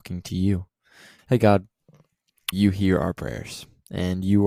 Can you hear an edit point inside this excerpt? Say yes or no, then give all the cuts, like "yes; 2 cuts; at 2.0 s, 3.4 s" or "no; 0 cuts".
yes; 2 cuts; at 1.2 s, 2.5 s